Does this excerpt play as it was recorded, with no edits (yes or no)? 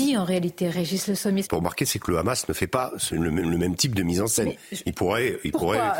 no